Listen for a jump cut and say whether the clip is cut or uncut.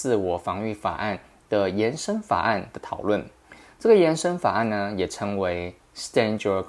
uncut